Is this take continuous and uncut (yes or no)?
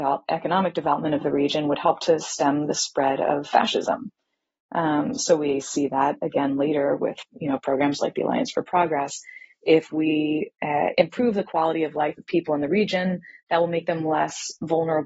yes